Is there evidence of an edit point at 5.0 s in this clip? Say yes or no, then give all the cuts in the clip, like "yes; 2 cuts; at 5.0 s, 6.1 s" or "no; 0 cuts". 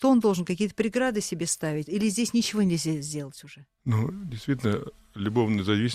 no; 1 cut; at 1.9 s